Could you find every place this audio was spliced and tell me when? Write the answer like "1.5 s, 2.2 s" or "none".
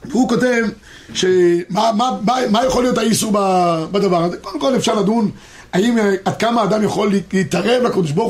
none